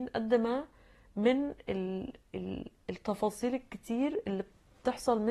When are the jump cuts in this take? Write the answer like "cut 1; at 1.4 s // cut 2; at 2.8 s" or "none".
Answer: none